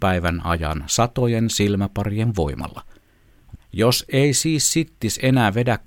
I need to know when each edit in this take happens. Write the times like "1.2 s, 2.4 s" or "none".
3.5 s

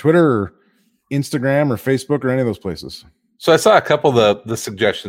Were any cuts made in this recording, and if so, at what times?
none

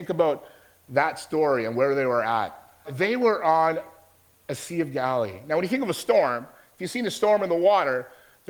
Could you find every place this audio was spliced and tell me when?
2.8 s

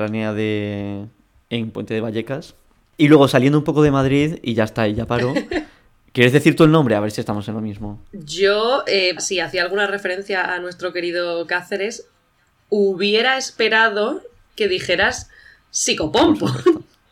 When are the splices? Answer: 9.2 s

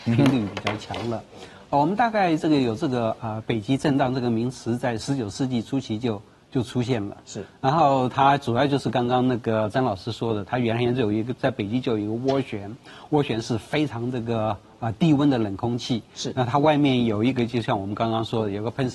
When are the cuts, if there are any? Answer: none

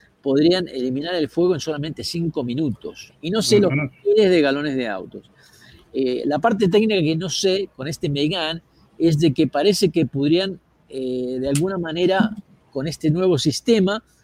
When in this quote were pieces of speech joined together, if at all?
3.1 s

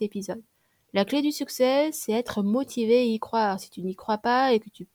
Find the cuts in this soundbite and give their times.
none

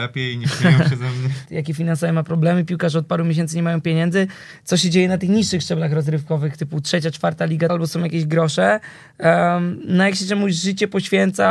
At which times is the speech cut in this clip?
1.5 s, 7.7 s

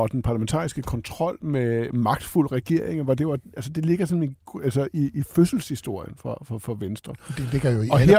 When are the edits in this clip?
none

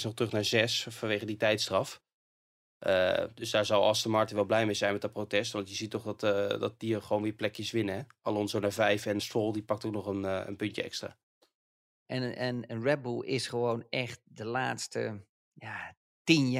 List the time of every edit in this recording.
9.2 s, 12.1 s

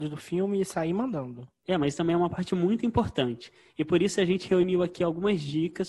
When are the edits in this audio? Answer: none

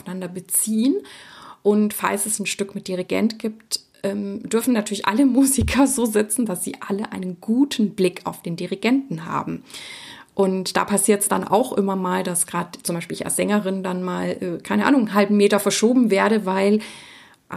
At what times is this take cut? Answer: none

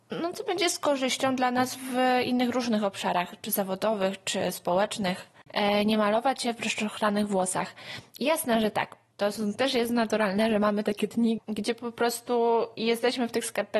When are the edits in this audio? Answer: 5.5 s, 11.4 s

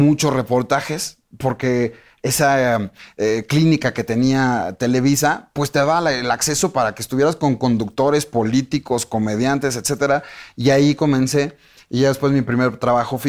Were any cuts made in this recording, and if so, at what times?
none

